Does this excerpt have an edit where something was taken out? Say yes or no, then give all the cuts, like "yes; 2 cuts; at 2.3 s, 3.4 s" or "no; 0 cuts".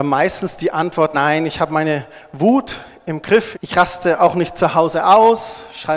yes; 2 cuts; at 1.1 s, 3.5 s